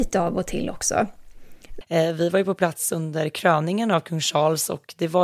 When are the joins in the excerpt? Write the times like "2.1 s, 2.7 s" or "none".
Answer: 1.8 s